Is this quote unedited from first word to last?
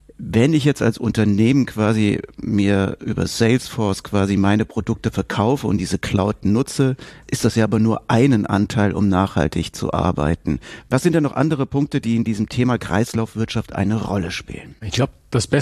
yes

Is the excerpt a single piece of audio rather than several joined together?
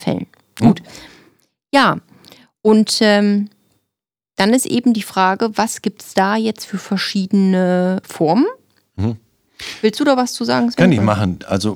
no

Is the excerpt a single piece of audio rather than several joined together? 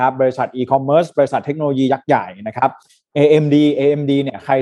yes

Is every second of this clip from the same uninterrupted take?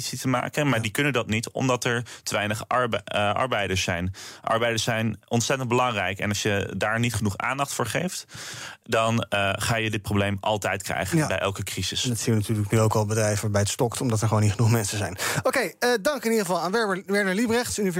yes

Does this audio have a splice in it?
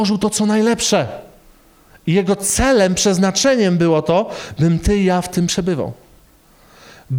no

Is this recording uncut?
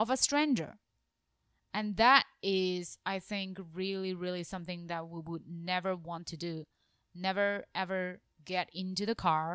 yes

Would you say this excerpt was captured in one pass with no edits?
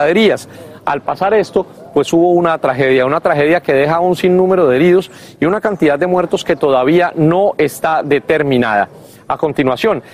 yes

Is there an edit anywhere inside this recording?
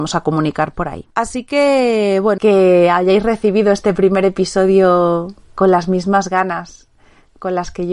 yes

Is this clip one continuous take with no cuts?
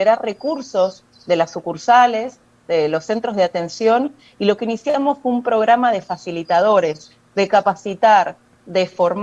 yes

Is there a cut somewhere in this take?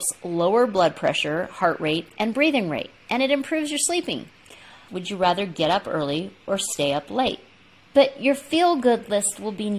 yes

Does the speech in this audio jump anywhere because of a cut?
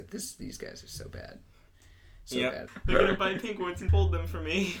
yes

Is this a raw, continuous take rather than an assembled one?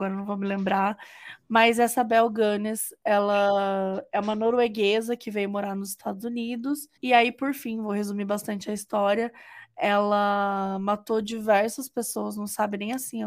no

